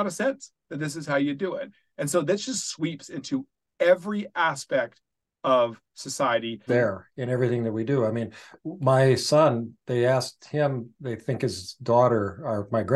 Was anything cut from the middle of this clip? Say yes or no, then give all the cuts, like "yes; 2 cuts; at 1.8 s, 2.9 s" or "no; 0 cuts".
yes; 1 cut; at 6.7 s